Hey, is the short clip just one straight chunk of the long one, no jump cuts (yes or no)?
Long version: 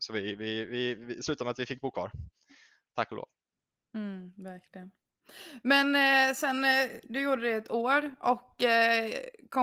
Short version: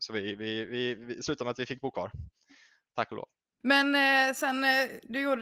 no